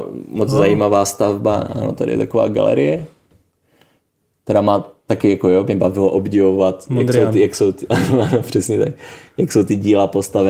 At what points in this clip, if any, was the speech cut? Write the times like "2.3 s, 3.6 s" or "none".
none